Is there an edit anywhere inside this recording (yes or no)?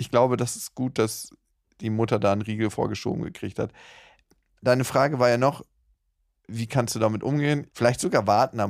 yes